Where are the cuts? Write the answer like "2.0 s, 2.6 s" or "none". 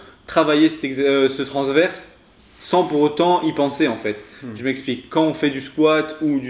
none